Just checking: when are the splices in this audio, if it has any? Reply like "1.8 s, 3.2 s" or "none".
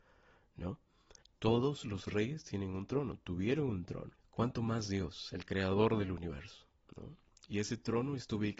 1.2 s, 4.2 s

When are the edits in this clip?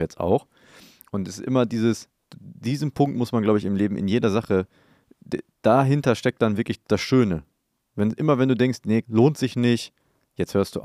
6.8 s, 9.0 s

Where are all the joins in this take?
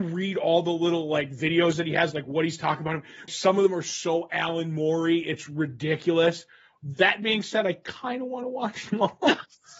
3.3 s

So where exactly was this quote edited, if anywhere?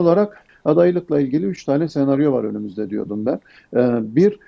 none

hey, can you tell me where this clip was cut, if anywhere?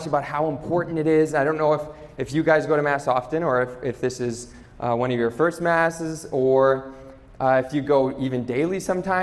none

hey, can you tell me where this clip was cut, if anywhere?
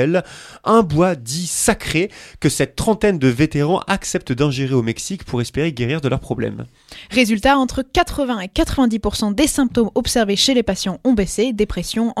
none

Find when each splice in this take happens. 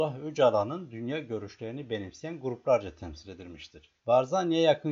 4.0 s

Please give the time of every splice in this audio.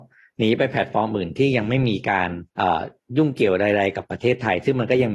2.5 s

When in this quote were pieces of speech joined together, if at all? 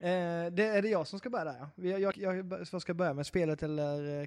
2.1 s

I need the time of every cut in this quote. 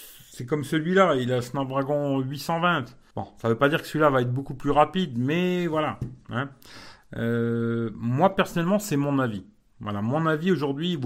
3.1 s

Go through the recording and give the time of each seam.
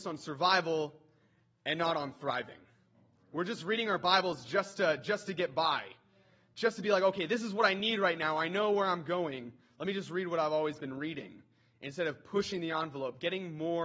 none

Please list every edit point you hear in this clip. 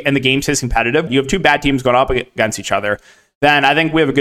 1.1 s

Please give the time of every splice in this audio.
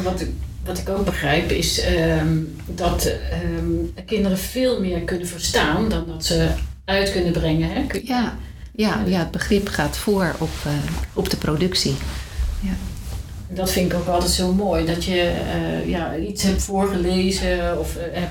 none

